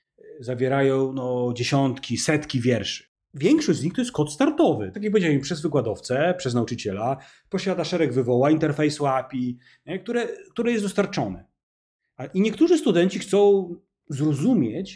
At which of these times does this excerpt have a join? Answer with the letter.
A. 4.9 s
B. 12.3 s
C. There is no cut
A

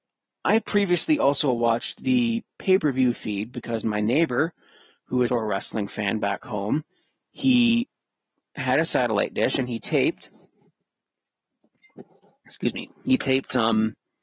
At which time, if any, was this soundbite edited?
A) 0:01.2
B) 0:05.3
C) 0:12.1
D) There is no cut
B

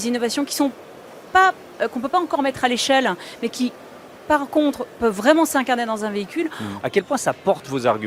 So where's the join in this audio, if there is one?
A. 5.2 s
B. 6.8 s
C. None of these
B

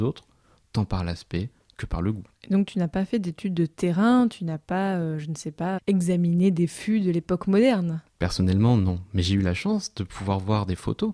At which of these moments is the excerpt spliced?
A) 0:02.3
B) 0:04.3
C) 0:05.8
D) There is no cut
C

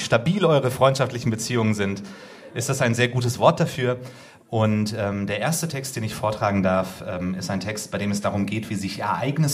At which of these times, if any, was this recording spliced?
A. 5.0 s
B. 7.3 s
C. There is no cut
C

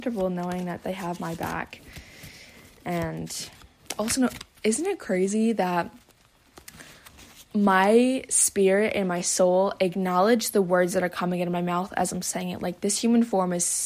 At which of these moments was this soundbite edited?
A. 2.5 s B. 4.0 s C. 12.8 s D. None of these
D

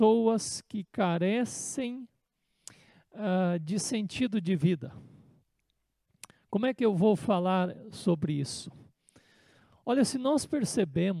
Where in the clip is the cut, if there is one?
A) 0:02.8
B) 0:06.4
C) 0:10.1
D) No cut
D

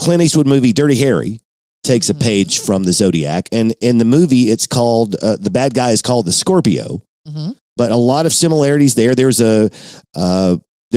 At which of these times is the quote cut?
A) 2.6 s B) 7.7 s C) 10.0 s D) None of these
D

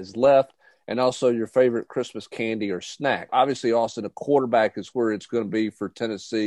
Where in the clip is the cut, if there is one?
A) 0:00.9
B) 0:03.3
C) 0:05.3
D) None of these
B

